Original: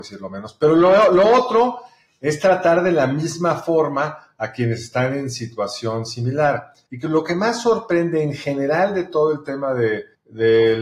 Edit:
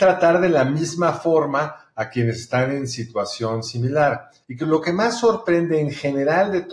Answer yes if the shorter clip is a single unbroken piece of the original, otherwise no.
yes